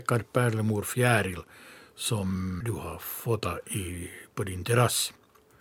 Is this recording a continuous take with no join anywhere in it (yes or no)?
no